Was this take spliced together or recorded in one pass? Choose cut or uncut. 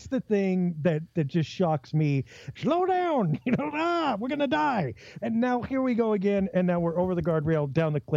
cut